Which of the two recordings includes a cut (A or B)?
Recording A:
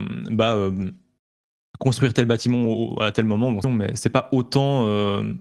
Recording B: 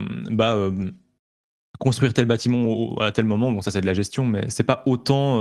A